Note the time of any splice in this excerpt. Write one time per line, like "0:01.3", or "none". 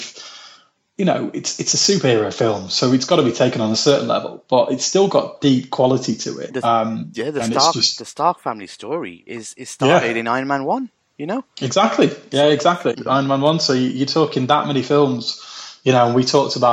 0:06.5
0:09.3
0:12.9